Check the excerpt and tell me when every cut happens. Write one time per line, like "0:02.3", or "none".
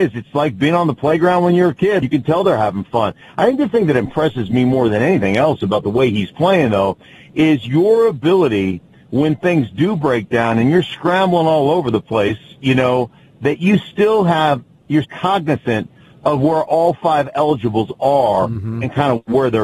0:02.0
0:15.0